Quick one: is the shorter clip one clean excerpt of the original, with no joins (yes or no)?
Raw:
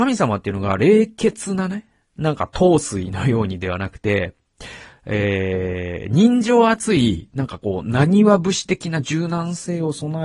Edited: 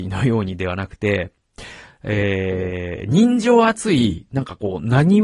yes